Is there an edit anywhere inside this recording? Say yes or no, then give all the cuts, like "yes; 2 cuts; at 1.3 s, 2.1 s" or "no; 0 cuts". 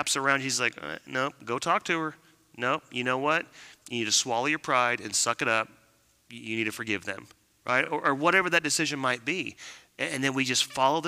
no; 0 cuts